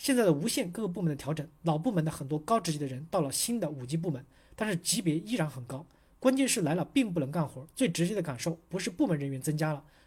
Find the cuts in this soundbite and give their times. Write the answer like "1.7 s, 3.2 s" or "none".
none